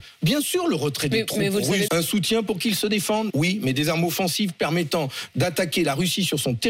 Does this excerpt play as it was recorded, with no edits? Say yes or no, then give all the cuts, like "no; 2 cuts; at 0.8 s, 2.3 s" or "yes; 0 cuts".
no; 2 cuts; at 1.9 s, 3.3 s